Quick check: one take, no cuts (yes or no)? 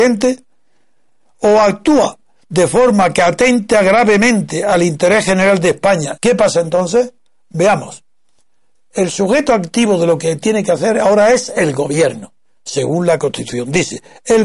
no